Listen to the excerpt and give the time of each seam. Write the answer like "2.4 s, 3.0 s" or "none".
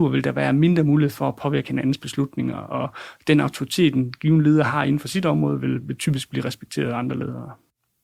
none

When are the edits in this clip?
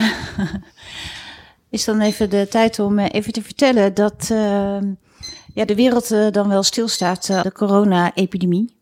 7.4 s

